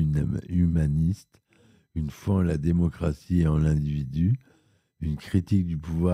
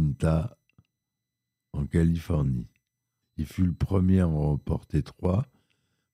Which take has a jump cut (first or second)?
second